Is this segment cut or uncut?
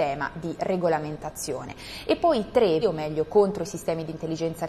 cut